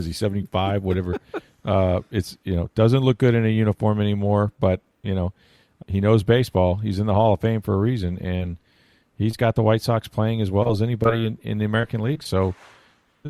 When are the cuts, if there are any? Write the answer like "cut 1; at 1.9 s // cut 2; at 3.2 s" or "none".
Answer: cut 1; at 5.8 s